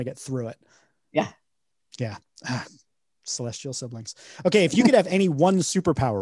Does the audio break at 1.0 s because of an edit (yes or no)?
no